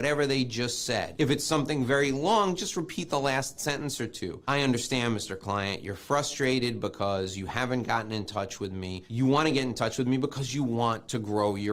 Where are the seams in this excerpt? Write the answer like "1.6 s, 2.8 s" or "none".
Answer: none